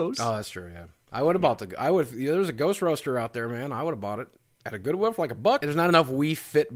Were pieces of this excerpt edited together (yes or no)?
yes